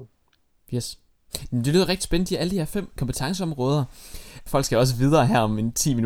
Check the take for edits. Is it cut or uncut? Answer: cut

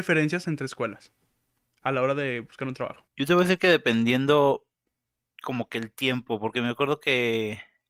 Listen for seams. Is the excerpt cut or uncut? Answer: cut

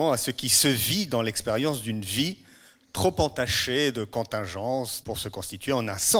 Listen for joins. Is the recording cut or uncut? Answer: cut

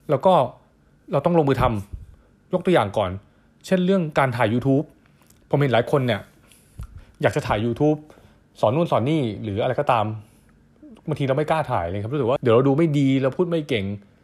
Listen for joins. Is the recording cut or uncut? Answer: cut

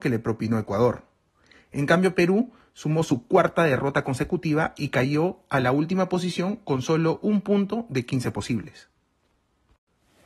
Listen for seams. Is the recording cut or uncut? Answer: uncut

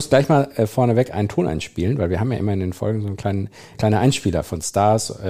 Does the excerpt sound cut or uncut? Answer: cut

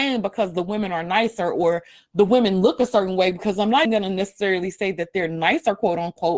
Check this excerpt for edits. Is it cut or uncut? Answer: cut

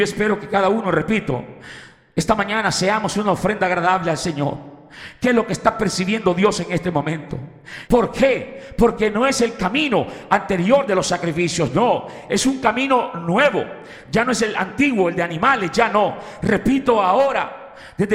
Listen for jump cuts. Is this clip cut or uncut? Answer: cut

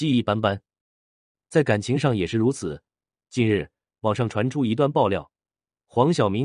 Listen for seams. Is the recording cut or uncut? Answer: cut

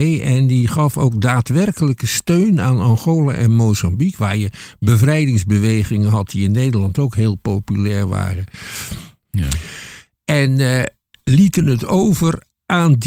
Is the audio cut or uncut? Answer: cut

